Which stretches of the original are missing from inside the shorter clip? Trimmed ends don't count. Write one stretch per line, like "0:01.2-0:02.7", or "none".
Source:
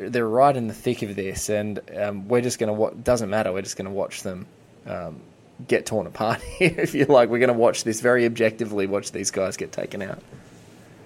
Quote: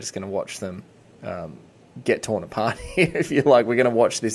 none